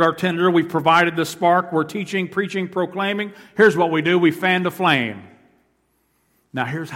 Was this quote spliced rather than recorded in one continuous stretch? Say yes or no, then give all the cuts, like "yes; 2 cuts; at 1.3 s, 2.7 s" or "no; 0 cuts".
no; 0 cuts